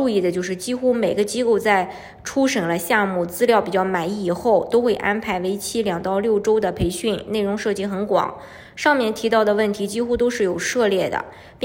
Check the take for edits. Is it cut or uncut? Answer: uncut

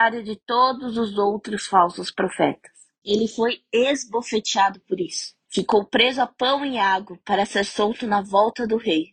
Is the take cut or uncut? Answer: uncut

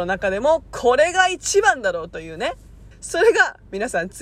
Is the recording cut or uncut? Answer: cut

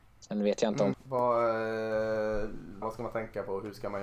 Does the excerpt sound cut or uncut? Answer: cut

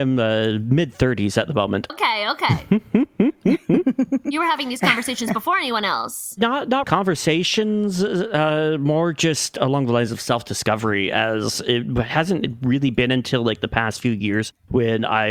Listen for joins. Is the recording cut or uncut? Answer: cut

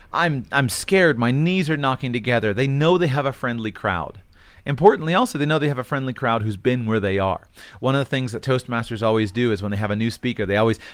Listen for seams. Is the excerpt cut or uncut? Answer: uncut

